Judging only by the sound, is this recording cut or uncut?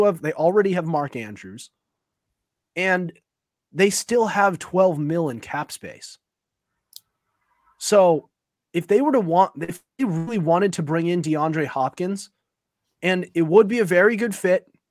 uncut